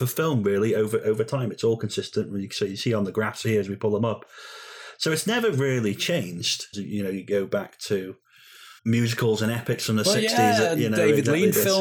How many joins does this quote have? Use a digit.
2